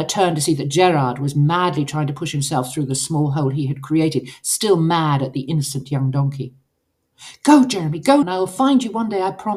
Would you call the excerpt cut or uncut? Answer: cut